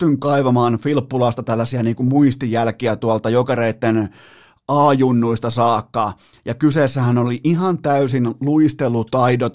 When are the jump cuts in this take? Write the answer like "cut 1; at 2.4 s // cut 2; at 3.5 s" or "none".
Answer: none